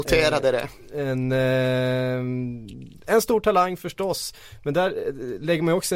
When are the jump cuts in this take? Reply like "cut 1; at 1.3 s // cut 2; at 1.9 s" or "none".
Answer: none